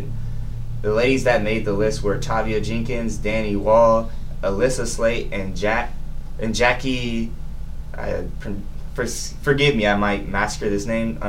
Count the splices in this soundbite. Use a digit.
2